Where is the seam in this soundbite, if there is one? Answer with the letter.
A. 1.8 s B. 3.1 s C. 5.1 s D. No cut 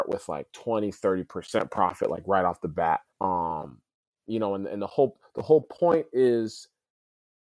B